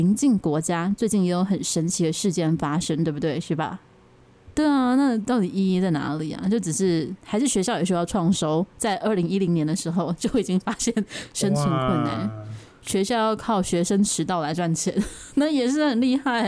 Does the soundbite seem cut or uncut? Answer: cut